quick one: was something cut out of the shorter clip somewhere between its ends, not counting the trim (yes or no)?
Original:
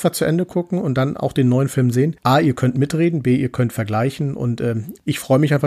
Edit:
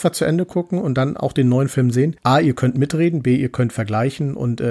no